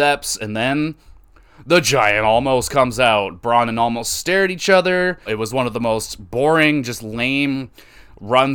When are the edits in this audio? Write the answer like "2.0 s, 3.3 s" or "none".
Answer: 5.3 s